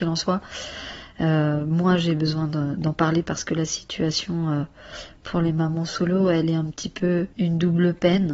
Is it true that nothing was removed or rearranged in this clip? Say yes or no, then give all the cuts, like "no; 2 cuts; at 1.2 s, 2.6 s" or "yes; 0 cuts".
no; 1 cut; at 7.3 s